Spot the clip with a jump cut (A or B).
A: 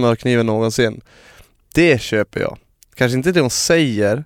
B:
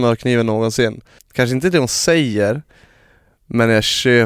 B